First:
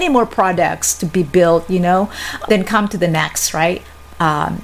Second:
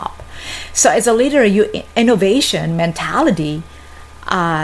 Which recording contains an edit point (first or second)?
first